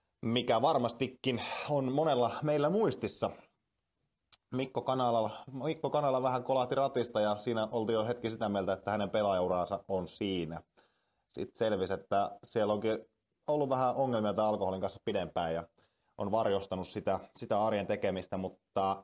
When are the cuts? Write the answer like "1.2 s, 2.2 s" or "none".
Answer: none

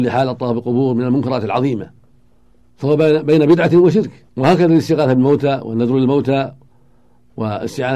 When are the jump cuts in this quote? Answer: 4.3 s

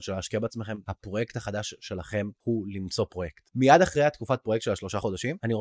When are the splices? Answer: none

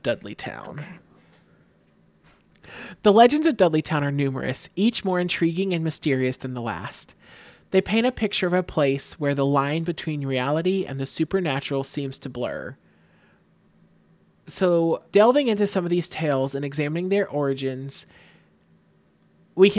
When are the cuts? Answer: 15.1 s

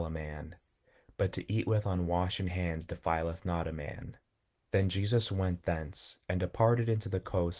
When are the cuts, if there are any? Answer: 4.5 s

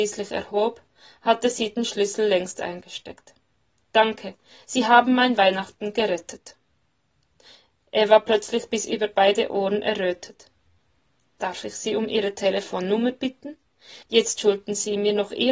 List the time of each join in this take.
14.0 s

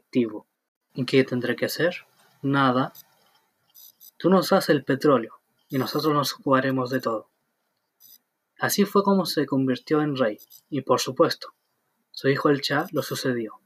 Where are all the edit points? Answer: none

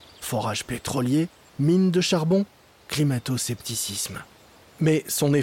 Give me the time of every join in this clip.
none

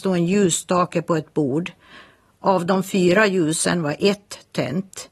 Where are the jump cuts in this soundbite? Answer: none

